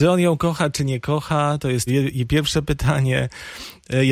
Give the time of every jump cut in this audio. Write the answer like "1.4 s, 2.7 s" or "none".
1.9 s